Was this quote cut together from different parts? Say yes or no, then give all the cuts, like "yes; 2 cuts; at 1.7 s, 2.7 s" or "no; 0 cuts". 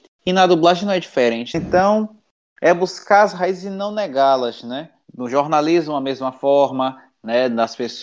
yes; 2 cuts; at 1.5 s, 5.0 s